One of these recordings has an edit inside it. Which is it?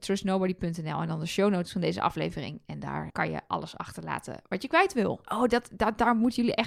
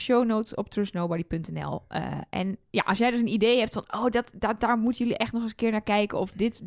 first; 2 cuts; at 3.1 s, 5.2 s

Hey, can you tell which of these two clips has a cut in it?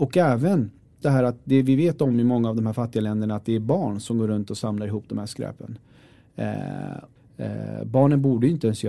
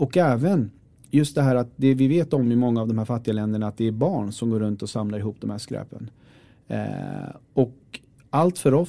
first; 2 cuts; at 1.0 s, 7.2 s

